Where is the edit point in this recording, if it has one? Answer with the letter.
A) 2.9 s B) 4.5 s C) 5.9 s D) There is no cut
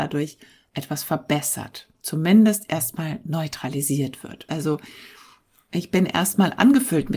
B